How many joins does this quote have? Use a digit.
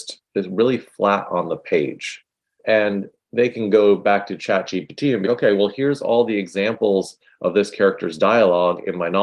2